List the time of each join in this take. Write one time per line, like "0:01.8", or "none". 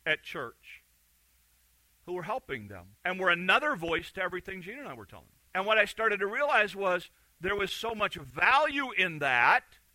0:02.9
0:05.5